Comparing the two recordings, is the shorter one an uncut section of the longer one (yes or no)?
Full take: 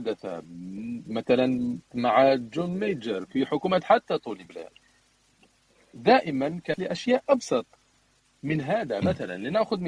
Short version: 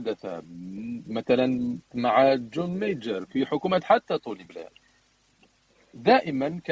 yes